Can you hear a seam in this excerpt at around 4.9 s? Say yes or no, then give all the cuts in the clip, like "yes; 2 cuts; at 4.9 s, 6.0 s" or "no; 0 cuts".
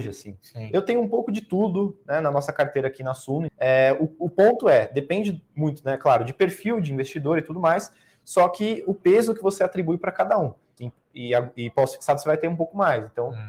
no; 2 cuts; at 3.5 s, 10.8 s